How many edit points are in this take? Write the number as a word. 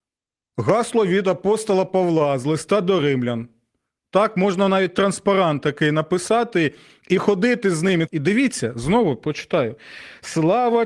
one